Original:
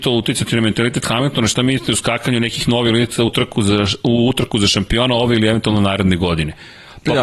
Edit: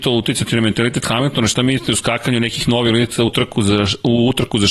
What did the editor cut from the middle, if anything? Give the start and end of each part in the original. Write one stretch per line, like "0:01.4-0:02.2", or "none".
none